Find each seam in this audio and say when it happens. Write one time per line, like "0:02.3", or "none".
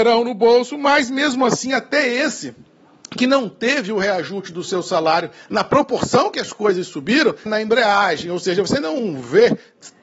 0:07.5